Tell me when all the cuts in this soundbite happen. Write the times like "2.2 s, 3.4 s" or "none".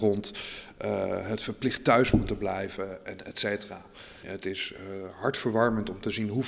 4.2 s